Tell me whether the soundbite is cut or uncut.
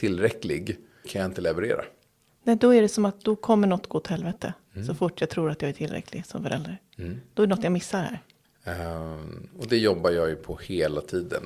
cut